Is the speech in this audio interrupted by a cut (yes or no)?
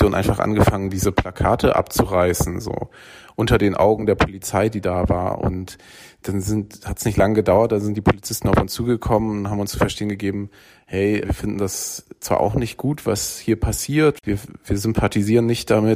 yes